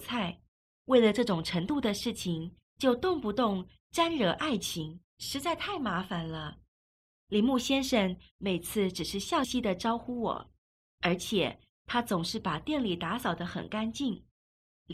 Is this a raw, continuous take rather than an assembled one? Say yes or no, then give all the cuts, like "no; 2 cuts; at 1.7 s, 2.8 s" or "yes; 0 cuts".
no; 1 cut; at 9.4 s